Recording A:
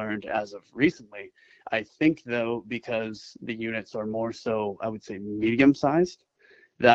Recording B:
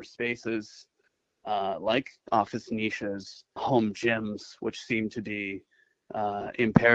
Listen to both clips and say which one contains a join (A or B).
B